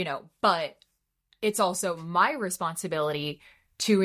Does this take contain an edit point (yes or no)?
no